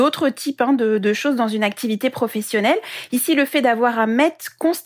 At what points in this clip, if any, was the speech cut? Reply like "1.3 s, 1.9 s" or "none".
none